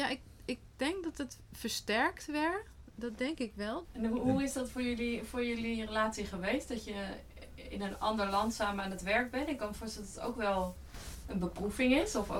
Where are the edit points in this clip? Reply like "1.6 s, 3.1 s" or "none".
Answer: 3.8 s